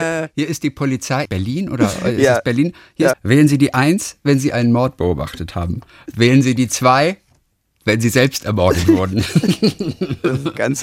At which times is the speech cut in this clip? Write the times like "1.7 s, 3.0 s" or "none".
1.3 s, 3.1 s